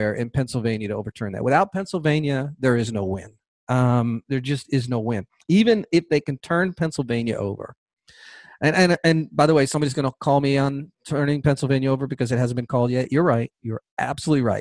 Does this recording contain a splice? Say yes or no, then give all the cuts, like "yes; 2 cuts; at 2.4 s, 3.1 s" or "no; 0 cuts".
no; 0 cuts